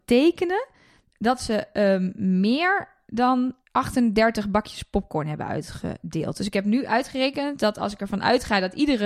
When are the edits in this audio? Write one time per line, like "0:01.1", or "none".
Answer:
none